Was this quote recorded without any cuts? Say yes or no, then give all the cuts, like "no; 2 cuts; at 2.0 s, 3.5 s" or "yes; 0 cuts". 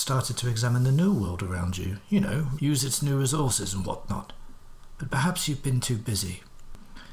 no; 1 cut; at 2.6 s